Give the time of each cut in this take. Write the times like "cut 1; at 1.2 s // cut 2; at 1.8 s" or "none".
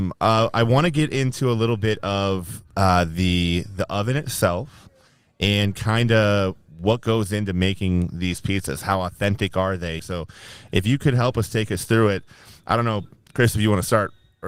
cut 1; at 10.0 s

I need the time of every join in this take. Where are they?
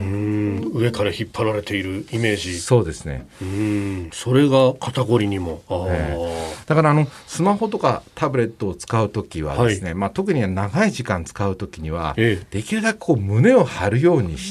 cut 1; at 4.1 s

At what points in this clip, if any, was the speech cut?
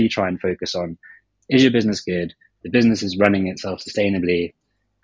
cut 1; at 2.6 s

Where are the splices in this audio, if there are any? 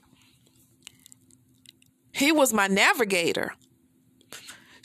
cut 1; at 2.1 s

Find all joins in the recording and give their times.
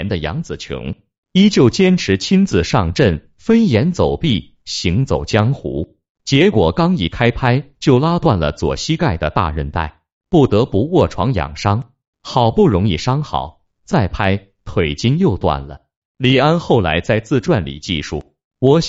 cut 1; at 16.0 s

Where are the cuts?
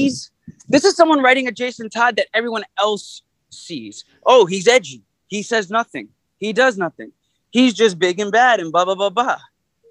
none

